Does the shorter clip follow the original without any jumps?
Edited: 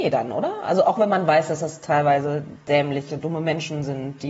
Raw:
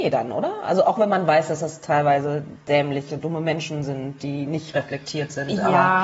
yes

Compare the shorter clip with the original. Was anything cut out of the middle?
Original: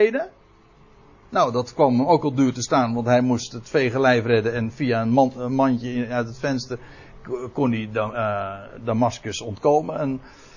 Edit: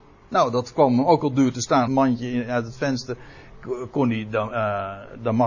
yes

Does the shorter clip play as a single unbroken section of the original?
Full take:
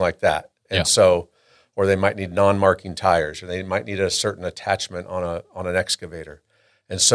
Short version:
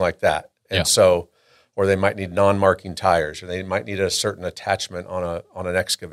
yes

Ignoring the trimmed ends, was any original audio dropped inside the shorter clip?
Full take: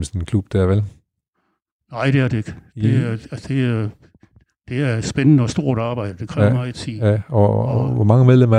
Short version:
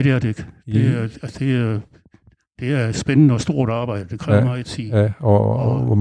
no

